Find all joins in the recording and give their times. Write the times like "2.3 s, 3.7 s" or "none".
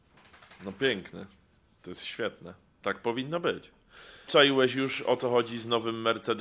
1.8 s, 4.3 s